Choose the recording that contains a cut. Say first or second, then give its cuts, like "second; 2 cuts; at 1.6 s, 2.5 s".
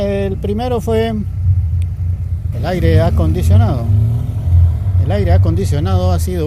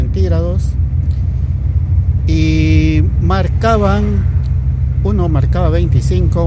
first; 1 cut; at 2.5 s